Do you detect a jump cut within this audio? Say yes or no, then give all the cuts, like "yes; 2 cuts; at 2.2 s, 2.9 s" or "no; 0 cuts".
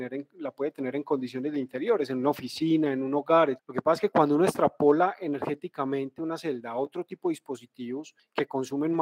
yes; 1 cut; at 3.6 s